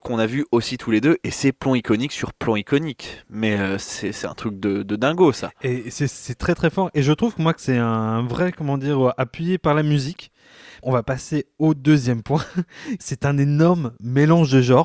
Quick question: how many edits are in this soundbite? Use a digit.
2